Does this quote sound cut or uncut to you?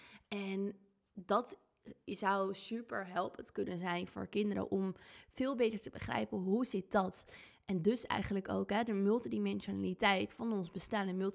uncut